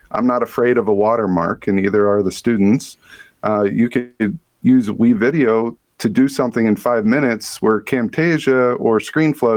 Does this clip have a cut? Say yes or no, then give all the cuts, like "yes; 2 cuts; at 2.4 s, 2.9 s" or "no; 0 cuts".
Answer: no; 0 cuts